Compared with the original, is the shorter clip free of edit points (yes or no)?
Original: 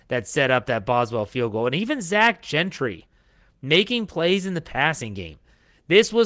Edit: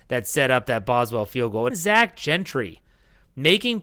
no